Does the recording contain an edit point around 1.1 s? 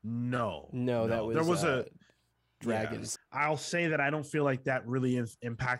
no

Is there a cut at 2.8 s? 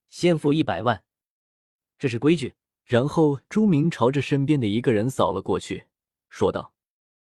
yes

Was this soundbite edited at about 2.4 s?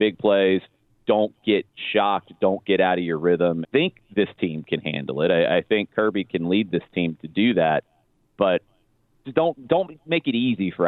no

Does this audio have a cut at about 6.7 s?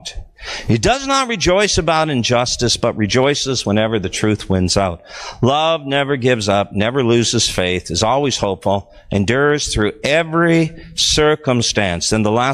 no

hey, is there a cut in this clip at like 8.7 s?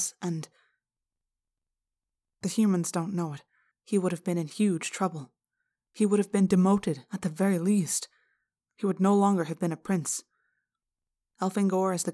no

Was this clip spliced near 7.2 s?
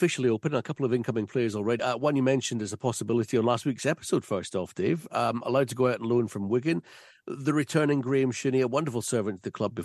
no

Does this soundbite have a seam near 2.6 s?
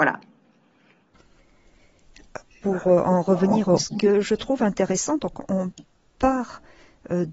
no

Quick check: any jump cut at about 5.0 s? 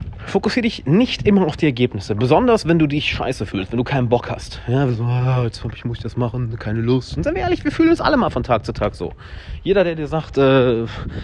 no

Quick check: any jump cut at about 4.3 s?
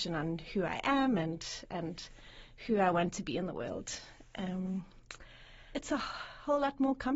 no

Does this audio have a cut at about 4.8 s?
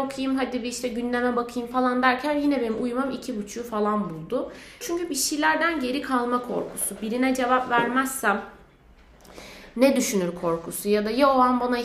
yes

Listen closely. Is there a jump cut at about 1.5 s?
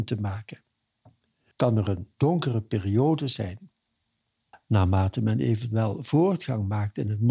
yes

